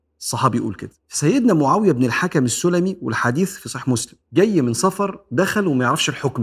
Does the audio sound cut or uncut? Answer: cut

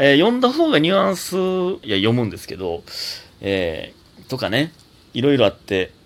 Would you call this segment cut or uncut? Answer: cut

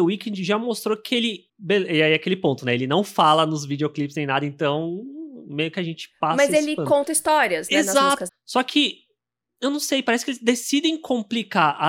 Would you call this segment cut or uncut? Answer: cut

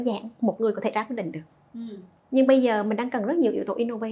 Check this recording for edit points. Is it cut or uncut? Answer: uncut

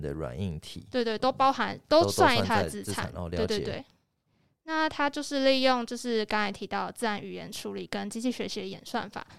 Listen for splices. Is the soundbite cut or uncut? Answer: uncut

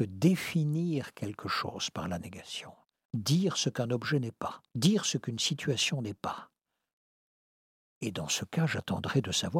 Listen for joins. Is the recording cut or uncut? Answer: cut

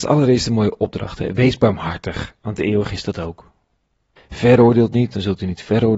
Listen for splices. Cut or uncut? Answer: cut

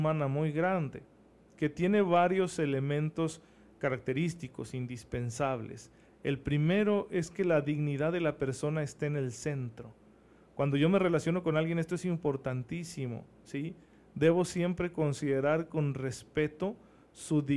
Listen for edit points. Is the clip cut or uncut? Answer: uncut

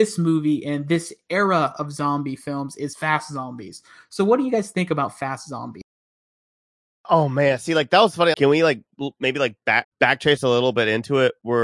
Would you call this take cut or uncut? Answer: cut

